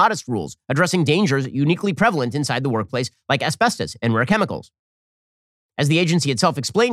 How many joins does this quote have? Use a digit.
0